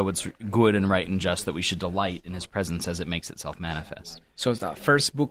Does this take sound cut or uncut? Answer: uncut